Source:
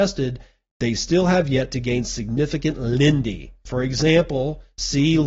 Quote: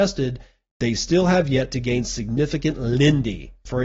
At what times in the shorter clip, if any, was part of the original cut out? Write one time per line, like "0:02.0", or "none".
none